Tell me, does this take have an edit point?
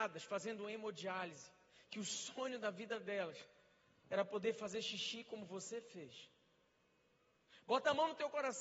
no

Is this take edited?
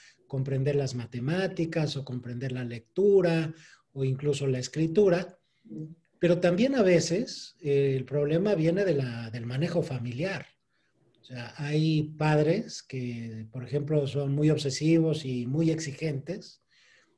no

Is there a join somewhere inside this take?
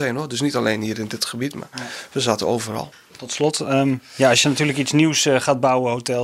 no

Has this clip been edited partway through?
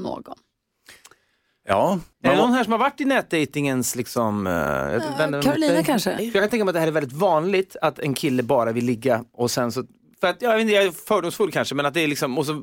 yes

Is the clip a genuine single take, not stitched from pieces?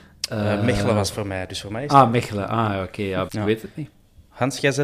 no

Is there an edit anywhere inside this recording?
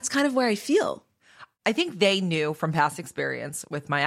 no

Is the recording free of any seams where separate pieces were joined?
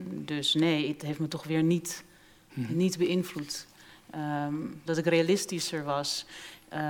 no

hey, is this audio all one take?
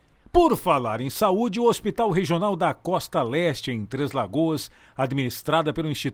yes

